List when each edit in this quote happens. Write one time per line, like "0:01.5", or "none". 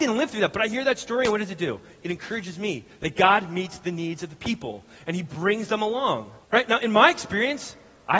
0:06.4

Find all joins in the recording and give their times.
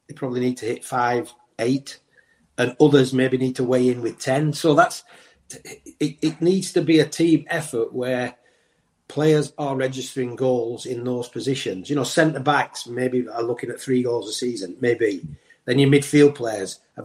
none

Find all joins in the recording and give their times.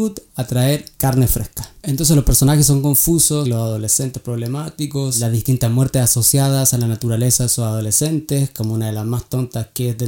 0:03.4

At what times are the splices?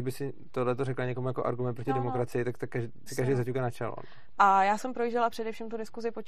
0:03.1
0:04.4

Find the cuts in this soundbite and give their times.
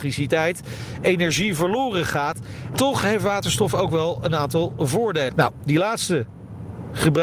0:02.7
0:05.3

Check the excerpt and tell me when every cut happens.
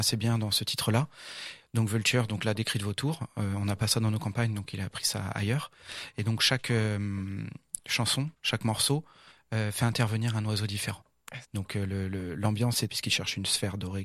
0:01.6
0:11.4
0:12.9

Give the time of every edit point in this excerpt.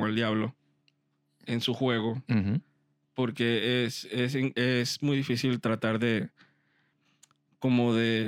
none

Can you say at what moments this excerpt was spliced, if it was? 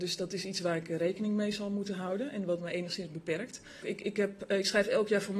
0:03.8

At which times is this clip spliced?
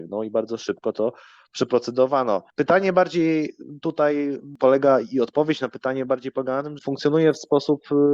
0:02.5
0:06.8

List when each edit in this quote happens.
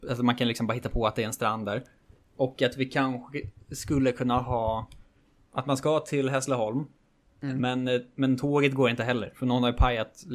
none

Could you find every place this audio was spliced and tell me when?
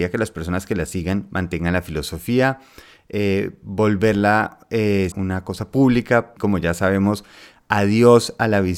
0:05.1
0:06.4

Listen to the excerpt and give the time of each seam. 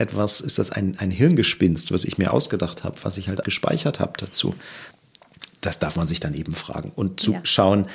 0:03.4

